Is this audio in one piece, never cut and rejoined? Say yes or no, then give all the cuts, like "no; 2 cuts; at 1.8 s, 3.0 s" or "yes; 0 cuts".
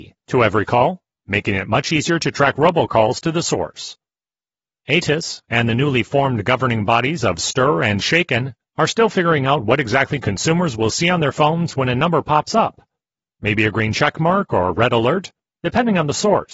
yes; 0 cuts